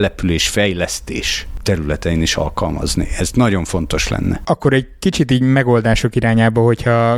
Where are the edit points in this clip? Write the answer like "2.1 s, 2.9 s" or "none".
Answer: none